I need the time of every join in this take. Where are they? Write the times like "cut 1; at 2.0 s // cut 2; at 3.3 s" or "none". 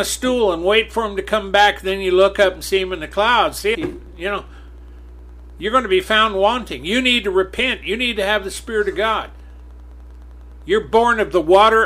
cut 1; at 3.7 s